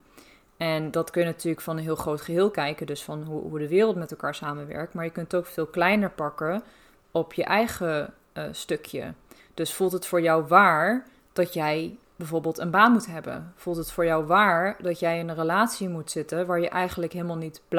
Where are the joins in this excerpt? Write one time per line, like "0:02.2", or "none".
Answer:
none